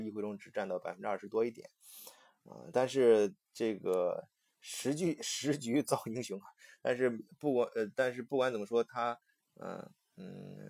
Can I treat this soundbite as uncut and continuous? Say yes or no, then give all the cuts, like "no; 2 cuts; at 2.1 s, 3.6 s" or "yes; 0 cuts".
yes; 0 cuts